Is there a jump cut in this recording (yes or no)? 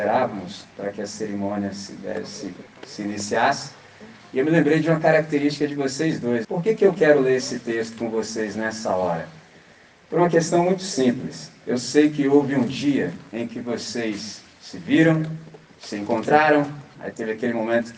yes